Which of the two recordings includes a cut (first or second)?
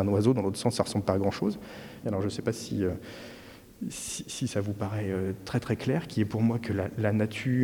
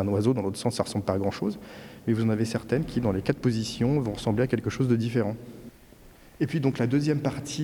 first